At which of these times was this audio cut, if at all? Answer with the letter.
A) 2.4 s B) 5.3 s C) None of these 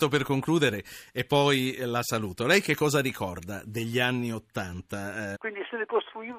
B